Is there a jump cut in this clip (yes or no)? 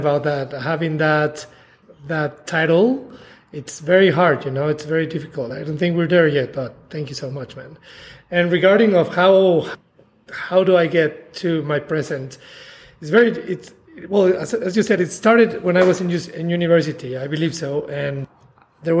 no